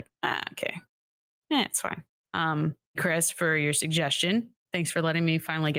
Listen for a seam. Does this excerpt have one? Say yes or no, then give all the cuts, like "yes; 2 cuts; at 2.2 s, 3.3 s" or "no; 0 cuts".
yes; 1 cut; at 3.0 s